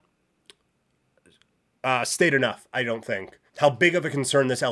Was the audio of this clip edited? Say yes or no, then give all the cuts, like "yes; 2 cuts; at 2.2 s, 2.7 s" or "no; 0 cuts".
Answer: yes; 1 cut; at 3.5 s